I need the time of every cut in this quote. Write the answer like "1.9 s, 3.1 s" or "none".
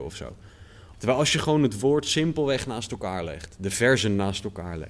0.9 s